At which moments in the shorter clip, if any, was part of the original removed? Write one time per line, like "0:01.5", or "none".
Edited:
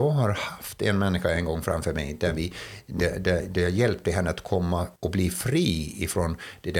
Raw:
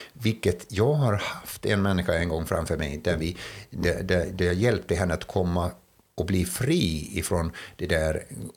0:05.0